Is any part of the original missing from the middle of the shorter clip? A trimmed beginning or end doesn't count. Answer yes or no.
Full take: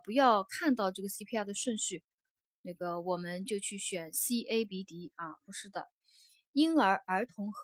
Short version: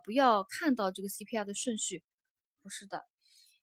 yes